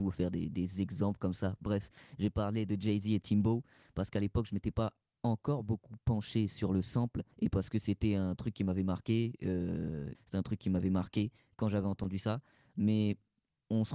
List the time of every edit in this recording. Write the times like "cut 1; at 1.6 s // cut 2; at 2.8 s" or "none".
cut 1; at 7.3 s // cut 2; at 10.1 s